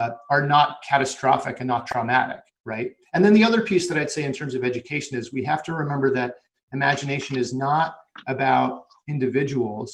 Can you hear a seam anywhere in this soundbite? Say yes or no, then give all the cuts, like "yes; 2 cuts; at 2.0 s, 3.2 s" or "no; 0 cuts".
yes; 1 cut; at 3.0 s